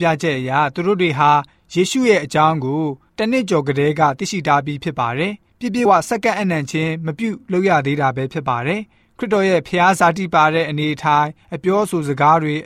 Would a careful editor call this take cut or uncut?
cut